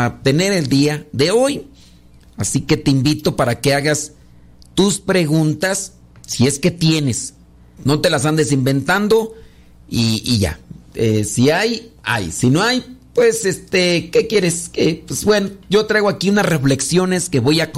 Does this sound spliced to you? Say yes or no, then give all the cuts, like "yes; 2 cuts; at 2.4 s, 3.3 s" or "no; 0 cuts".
yes; 1 cut; at 7.8 s